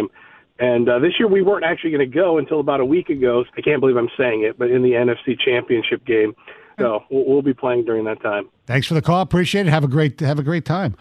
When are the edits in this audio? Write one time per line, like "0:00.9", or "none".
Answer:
0:03.5
0:06.8
0:08.5